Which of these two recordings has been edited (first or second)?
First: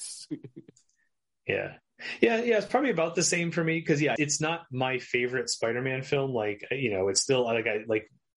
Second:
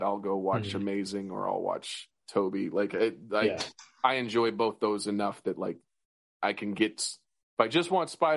first